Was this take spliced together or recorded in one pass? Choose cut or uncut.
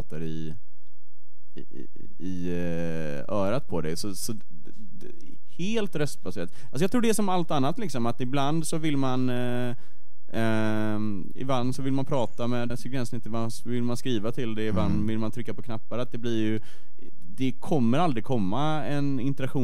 cut